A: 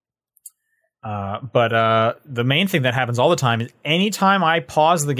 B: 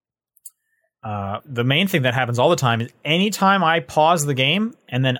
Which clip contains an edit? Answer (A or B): B